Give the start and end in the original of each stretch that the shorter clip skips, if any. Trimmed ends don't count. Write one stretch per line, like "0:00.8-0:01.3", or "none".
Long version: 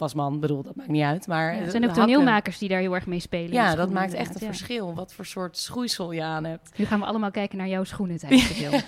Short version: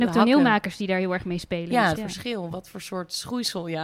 0:03.8-0:04.4

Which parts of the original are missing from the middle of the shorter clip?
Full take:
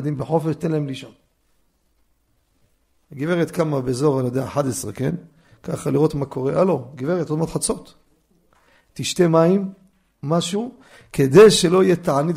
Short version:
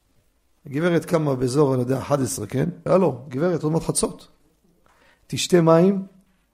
0:05.3-0:06.5

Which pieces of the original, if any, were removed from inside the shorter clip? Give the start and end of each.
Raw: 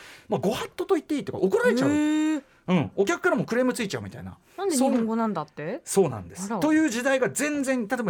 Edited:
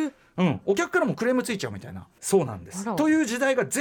0:04.5-0:05.8

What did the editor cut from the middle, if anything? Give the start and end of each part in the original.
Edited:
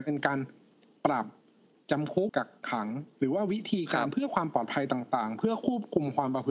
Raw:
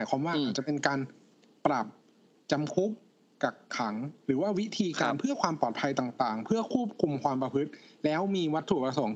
0:02.9-0:03.4

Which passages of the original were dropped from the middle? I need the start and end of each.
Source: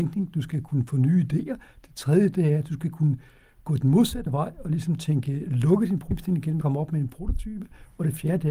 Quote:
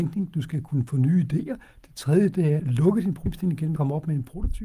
0:02.6-0:05.4

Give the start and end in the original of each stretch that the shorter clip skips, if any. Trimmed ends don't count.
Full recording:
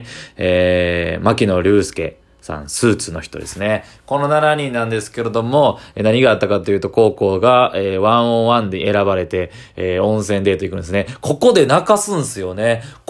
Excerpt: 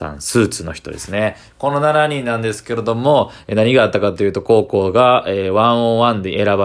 none

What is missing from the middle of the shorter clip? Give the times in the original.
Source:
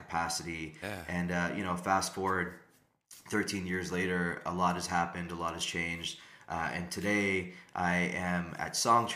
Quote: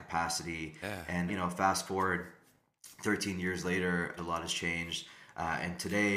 0:01.3-0:01.5
0:04.4-0:05.3

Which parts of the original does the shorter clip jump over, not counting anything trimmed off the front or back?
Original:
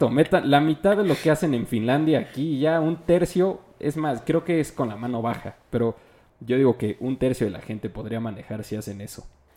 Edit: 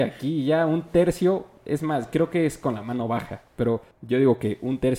0:06.0-0:06.3

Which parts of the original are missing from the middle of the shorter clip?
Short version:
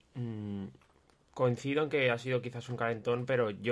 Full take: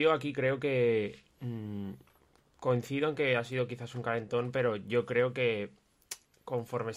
none

